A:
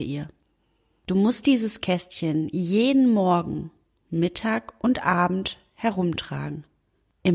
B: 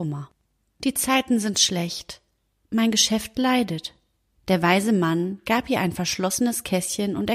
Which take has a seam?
B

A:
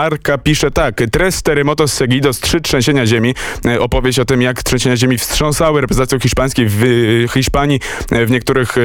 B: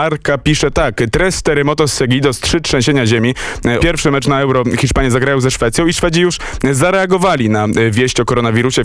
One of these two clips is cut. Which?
B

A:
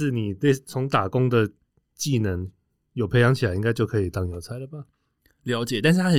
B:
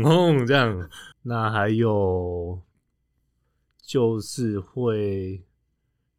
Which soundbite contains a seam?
B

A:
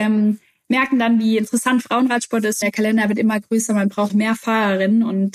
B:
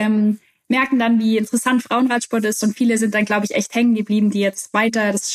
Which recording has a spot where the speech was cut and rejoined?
A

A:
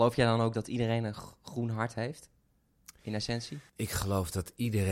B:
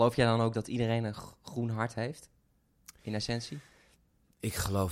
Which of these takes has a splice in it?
A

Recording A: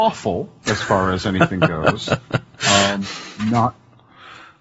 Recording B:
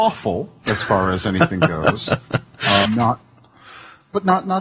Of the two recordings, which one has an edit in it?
B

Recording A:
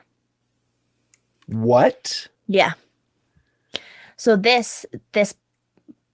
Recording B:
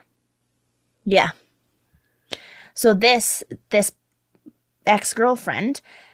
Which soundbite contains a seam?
B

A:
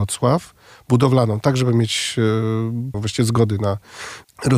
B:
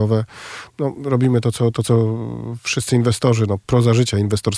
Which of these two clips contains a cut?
A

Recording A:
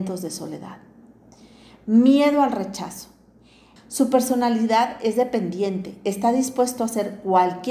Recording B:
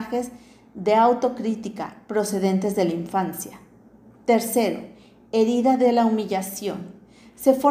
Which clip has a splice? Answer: A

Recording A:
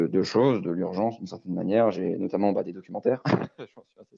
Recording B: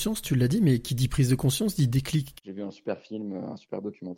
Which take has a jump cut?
B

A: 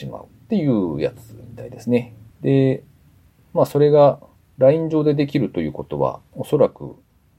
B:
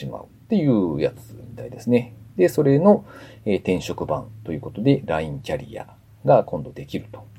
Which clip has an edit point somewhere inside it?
A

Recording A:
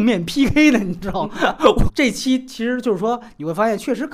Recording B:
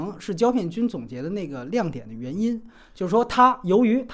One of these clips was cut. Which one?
A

